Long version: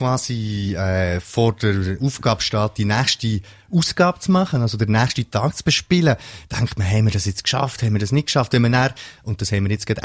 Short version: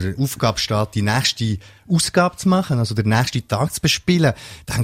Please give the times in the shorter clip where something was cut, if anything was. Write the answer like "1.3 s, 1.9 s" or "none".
none